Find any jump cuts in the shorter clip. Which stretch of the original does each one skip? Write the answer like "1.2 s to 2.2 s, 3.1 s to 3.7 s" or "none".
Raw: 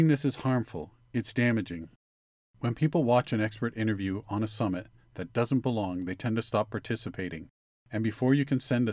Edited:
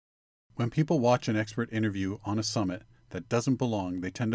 none